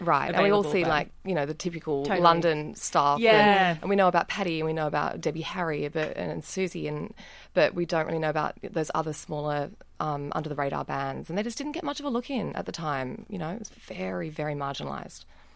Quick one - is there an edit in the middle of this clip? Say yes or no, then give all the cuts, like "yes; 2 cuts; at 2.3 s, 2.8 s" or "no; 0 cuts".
no; 0 cuts